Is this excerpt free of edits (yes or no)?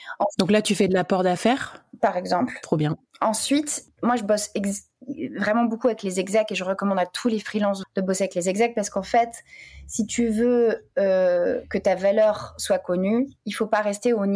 no